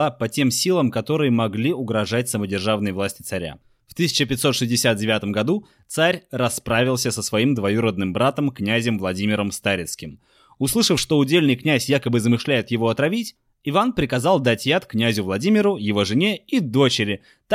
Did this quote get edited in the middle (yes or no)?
no